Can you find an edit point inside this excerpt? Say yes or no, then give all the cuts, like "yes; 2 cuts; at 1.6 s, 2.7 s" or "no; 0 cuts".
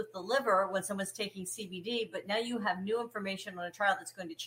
no; 0 cuts